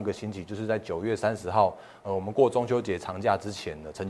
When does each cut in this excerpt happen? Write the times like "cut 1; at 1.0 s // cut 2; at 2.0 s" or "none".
none